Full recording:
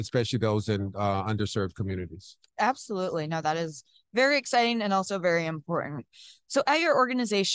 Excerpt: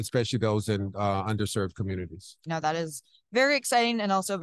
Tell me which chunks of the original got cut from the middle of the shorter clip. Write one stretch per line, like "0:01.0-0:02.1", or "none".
0:02.5-0:03.3